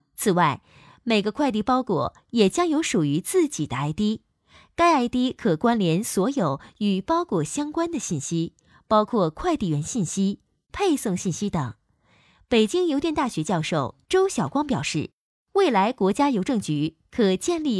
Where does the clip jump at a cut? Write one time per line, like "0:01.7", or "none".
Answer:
0:10.6